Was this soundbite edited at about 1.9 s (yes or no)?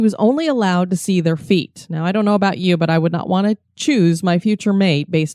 no